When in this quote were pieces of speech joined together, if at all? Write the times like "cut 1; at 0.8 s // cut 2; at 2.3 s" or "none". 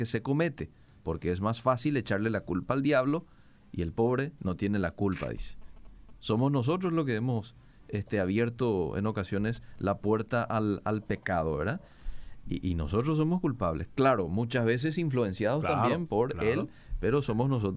cut 1; at 6.1 s